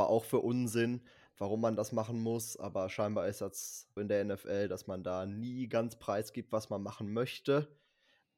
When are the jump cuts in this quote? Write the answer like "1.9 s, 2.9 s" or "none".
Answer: 4.0 s